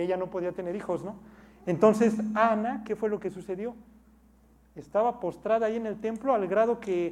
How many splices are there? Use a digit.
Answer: 0